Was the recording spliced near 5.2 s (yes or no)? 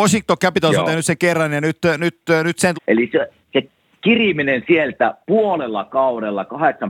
yes